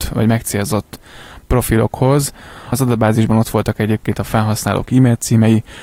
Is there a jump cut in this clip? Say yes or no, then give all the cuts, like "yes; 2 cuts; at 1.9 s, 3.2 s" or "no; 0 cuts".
yes; 1 cut; at 2.7 s